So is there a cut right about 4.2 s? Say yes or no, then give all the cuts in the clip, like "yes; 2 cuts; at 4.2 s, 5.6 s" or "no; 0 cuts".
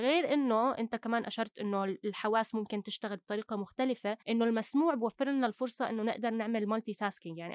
yes; 1 cut; at 4.2 s